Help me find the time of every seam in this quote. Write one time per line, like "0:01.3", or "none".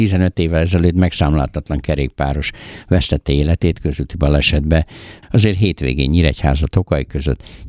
0:05.2